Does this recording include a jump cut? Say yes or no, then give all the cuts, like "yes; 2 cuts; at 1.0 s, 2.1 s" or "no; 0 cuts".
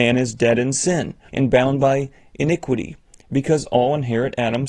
yes; 1 cut; at 1.3 s